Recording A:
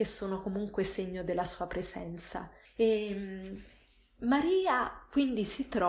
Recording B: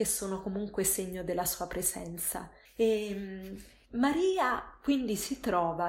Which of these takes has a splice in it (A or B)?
B